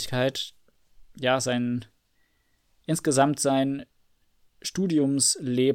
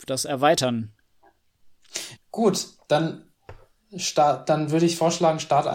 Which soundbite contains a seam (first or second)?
second